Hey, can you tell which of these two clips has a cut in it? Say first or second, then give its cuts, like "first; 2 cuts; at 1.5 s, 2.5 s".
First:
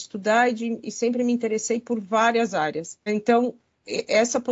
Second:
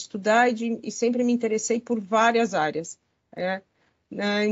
first; 1 cut; at 3.1 s